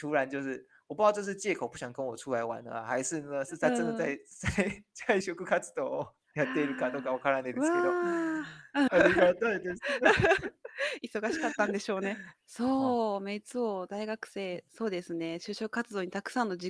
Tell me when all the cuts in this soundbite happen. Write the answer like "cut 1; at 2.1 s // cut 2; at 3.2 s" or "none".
cut 1; at 5.2 s // cut 2; at 8.9 s // cut 3; at 12.3 s